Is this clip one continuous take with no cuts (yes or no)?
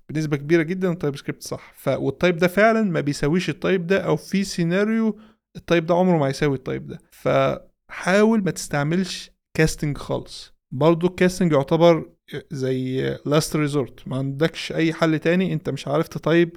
yes